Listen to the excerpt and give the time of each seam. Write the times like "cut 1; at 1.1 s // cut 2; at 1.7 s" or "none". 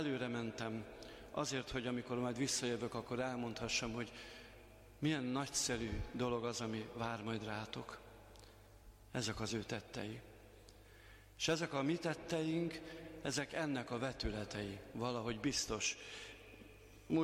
cut 1; at 9.1 s